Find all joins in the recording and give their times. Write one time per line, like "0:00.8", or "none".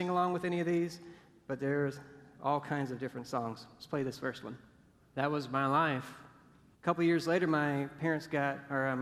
0:06.7